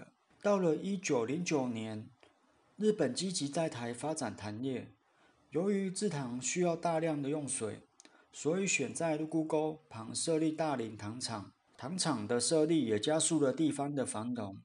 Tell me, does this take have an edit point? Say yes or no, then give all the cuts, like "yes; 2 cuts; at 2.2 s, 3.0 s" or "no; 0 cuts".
no; 0 cuts